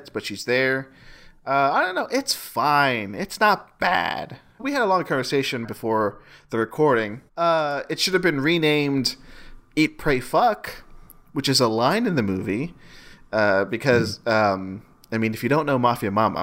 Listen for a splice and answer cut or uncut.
cut